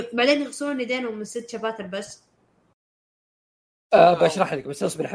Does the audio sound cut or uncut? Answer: uncut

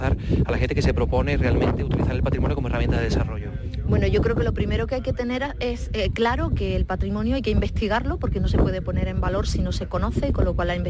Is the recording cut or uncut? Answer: uncut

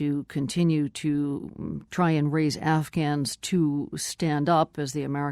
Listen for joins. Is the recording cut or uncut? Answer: uncut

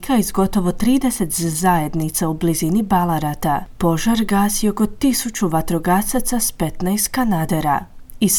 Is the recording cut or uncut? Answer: uncut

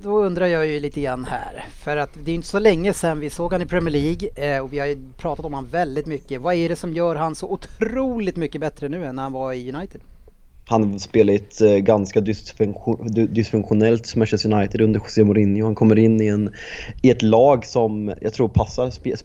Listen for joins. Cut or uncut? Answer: uncut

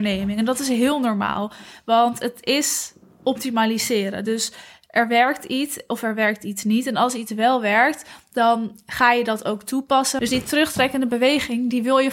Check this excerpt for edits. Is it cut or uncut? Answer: cut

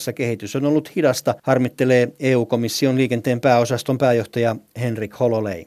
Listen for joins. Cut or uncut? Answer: cut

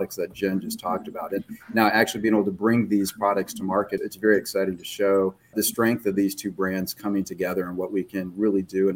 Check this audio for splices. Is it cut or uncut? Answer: cut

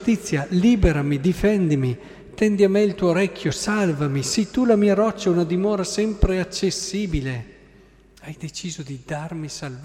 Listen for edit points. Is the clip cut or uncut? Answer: uncut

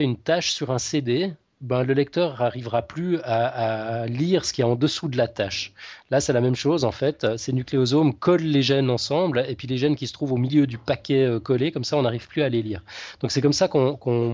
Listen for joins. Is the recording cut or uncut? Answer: uncut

